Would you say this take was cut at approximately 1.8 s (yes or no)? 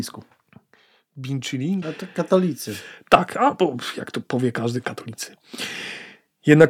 yes